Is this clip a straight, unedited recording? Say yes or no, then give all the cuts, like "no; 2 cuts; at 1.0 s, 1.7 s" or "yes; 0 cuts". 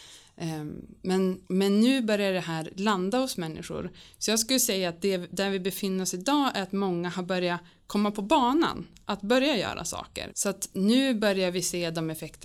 no; 2 cuts; at 1.4 s, 10.3 s